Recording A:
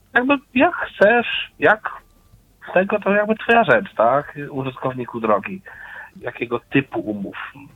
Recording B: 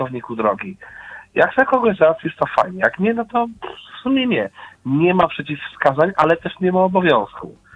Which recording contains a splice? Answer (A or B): A